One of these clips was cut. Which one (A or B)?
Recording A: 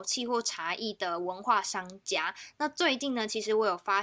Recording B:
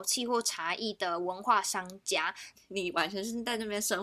B